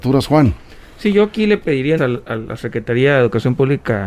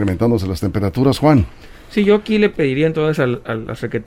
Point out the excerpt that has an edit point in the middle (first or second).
first